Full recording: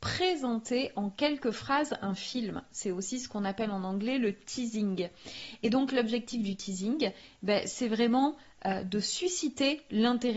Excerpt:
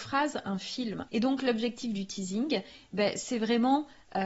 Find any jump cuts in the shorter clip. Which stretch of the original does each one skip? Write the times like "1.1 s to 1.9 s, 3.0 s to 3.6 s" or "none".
2.6 s to 5.6 s